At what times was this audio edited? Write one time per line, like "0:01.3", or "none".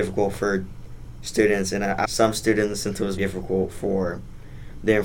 0:02.0
0:03.2